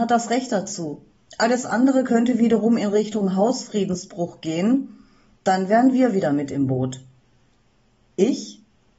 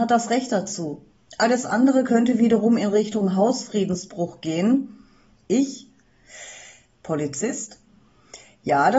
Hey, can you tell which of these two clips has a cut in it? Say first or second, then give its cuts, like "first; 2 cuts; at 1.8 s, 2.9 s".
second; 2 cuts; at 5.4 s, 6.9 s